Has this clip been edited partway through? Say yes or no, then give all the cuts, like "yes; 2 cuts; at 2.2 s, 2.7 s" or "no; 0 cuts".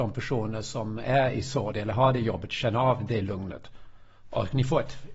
yes; 1 cut; at 4.2 s